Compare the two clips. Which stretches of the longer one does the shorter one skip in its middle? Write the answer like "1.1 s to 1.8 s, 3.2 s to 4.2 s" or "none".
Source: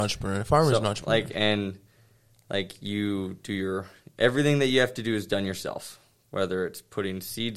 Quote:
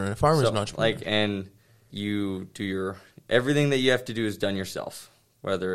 2.2 s to 2.8 s